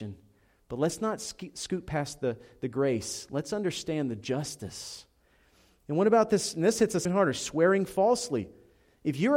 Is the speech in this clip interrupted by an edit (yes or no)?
yes